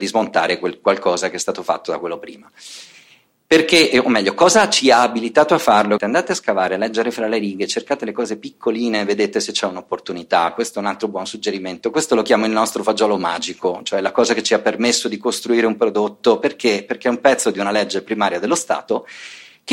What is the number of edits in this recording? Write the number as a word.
one